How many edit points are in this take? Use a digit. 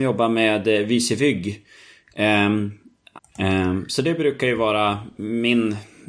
1